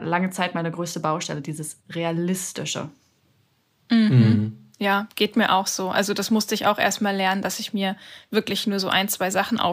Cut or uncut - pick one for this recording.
cut